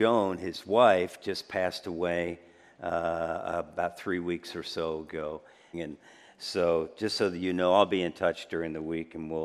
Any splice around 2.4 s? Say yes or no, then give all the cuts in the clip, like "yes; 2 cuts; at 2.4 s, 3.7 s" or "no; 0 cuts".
no; 1 cut; at 5.7 s